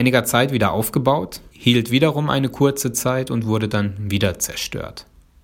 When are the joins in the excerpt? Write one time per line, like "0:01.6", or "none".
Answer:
0:01.5